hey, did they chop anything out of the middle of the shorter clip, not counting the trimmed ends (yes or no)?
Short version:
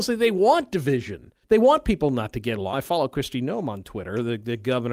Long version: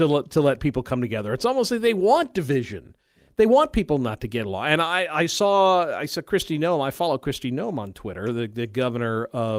yes